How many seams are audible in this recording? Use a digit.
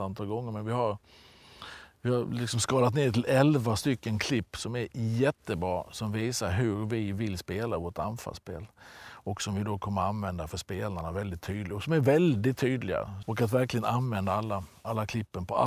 1